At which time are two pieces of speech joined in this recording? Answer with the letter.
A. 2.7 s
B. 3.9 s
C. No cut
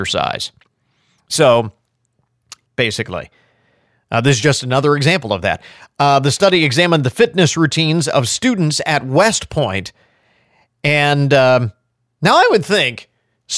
A